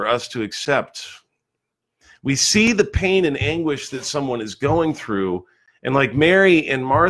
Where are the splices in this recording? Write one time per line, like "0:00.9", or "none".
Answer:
none